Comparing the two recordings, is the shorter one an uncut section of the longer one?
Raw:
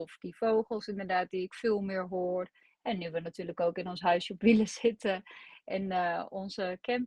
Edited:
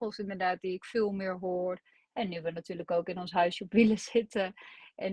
yes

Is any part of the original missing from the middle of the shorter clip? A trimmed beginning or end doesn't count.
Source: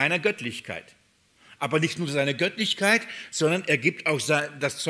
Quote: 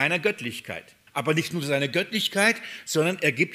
yes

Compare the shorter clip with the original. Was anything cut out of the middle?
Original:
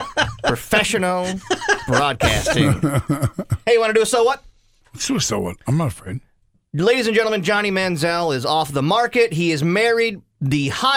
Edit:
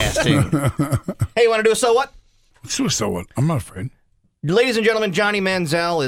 no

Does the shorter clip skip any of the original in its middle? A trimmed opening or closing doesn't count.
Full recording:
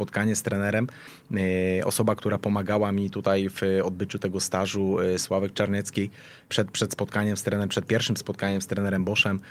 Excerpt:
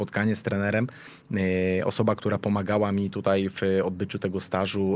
no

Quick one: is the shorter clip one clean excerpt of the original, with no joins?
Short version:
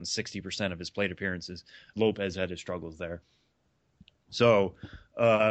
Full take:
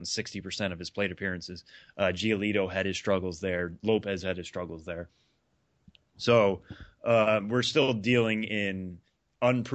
no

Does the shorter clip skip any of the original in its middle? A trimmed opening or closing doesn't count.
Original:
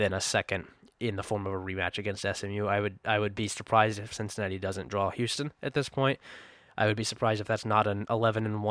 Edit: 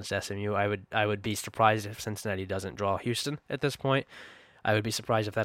no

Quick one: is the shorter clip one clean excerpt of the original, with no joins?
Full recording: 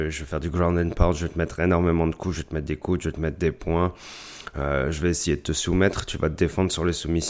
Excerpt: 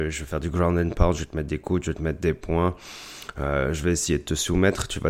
no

